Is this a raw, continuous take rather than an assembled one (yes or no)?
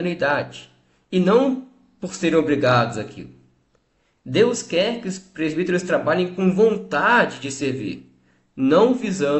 yes